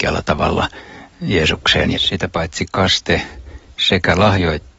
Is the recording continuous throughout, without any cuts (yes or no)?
no